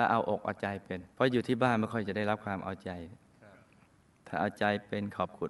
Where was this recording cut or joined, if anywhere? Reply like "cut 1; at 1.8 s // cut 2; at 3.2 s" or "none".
cut 1; at 1.1 s